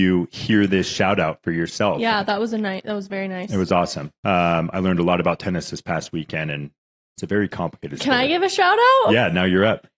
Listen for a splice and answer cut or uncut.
uncut